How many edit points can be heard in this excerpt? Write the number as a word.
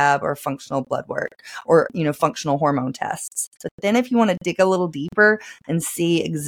two